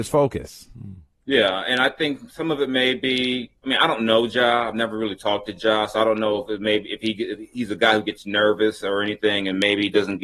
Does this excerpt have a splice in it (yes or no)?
no